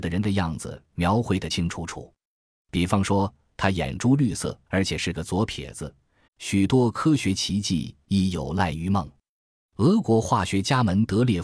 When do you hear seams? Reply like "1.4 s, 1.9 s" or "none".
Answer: 1.5 s, 4.7 s, 6.3 s